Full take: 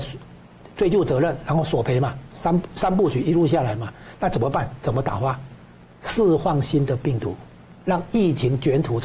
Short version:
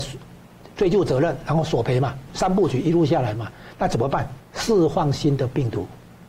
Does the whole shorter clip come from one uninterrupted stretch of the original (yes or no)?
no